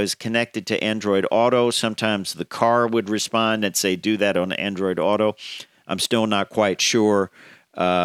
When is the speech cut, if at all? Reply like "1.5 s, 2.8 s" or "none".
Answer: none